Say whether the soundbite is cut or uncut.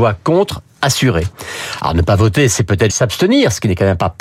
cut